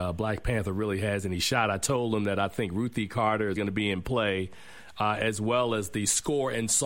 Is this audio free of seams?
no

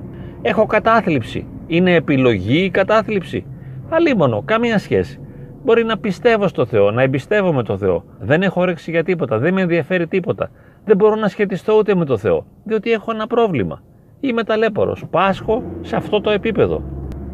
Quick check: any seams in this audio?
yes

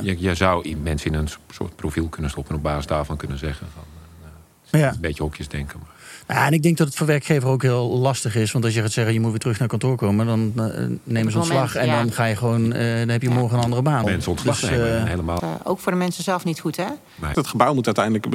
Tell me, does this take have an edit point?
yes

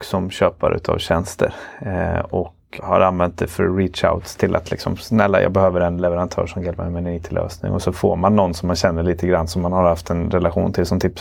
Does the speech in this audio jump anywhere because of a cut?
yes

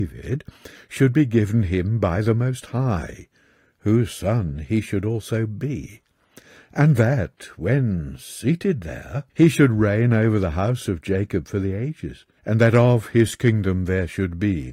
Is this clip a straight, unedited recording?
no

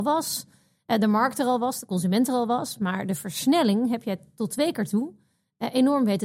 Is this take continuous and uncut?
yes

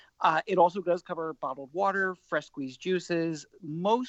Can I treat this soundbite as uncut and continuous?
yes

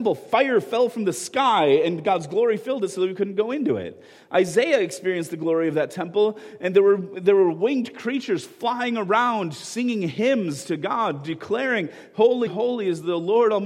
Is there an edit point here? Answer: yes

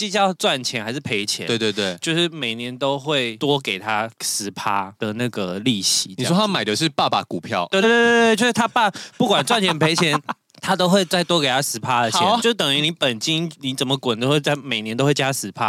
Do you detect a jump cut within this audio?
yes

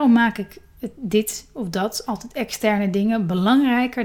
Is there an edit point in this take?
no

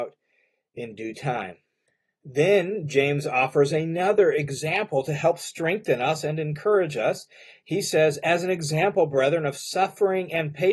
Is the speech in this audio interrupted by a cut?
no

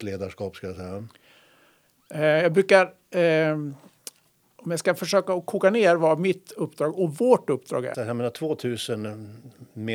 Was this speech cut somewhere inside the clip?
yes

